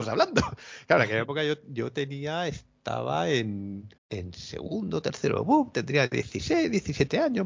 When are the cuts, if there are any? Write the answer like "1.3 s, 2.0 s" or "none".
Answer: 4.0 s